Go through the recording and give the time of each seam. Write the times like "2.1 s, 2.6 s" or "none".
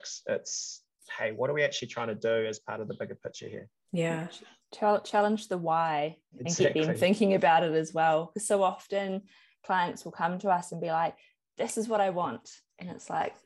none

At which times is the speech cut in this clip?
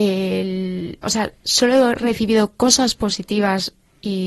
1.0 s

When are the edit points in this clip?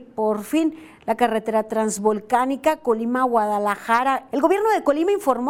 4.3 s

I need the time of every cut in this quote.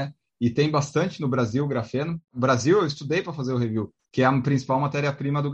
4.0 s

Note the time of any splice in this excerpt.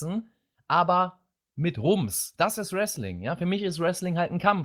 none

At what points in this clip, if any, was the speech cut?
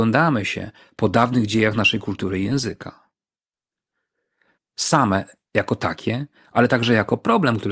4.6 s

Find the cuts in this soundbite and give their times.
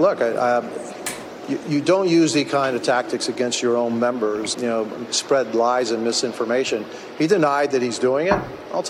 1.6 s, 4.5 s

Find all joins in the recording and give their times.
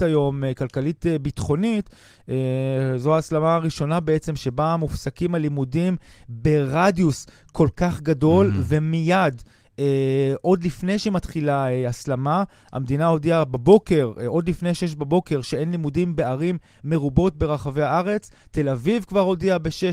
none

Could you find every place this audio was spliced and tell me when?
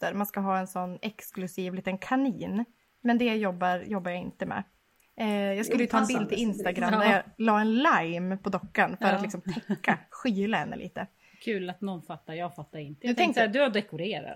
5.0 s

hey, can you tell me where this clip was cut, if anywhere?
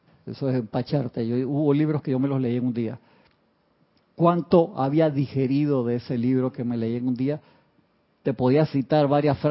8.1 s

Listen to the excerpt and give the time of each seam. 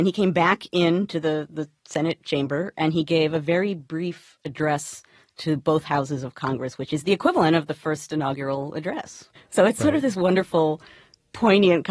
9.4 s

